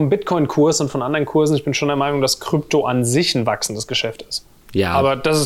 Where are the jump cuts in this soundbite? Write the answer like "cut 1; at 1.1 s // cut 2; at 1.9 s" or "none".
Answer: none